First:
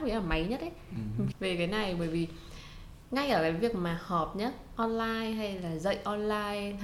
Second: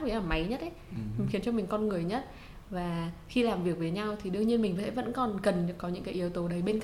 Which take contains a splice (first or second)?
first